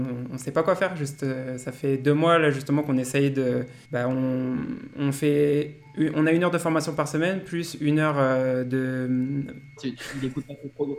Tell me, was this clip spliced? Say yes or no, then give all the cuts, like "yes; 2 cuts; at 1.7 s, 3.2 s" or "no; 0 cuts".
yes; 2 cuts; at 3.8 s, 9.8 s